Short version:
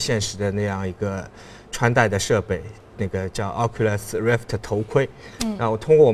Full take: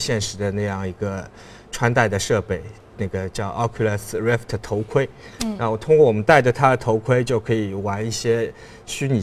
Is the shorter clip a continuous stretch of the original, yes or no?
yes